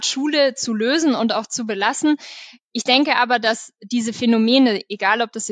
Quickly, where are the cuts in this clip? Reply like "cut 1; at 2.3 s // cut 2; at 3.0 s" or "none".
none